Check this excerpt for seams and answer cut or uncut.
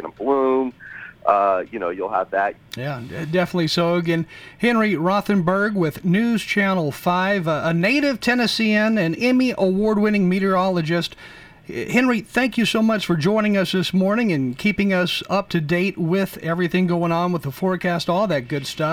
cut